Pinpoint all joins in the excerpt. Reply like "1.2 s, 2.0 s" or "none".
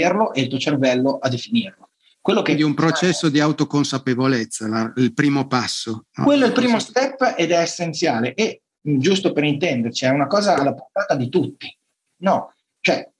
12.2 s